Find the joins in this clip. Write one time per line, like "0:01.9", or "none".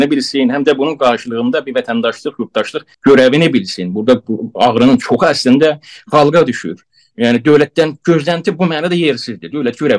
0:02.9